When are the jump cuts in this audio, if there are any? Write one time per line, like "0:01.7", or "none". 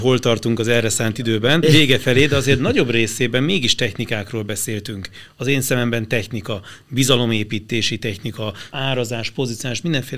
0:01.6
0:08.7

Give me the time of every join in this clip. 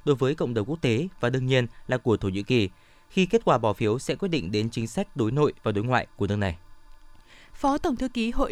none

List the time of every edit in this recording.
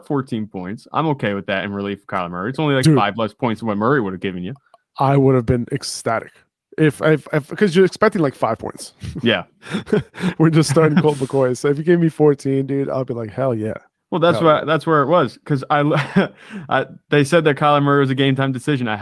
none

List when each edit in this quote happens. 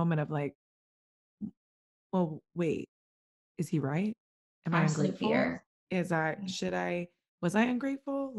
0:05.8

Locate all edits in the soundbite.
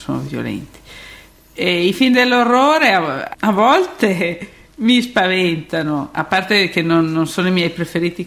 0:03.3

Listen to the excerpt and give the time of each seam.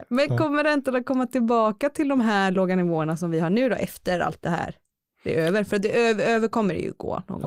none

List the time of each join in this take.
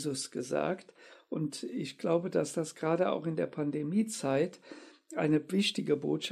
none

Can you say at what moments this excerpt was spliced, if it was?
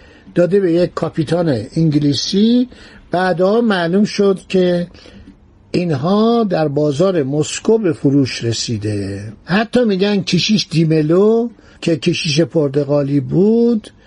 none

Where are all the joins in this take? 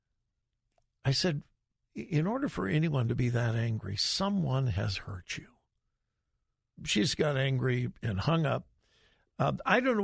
0:06.8

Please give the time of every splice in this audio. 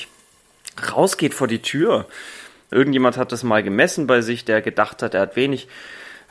0:02.7

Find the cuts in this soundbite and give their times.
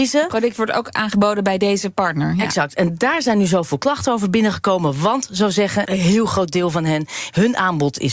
0:05.9

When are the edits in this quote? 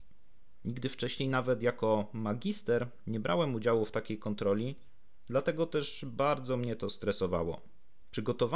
none

